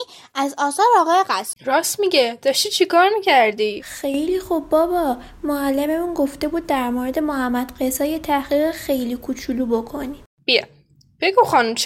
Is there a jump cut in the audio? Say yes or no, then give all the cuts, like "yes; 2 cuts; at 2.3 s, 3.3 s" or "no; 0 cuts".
yes; 1 cut; at 1.5 s